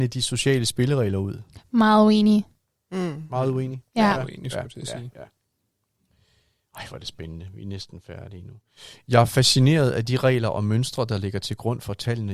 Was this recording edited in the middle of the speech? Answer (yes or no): no